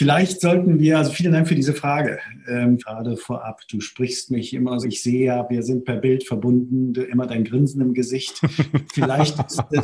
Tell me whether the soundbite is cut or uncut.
cut